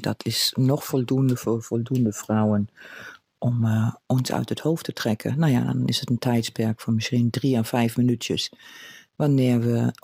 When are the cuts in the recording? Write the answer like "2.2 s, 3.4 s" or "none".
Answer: none